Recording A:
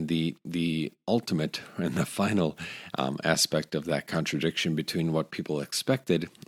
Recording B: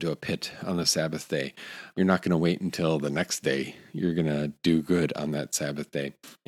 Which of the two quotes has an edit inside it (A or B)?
B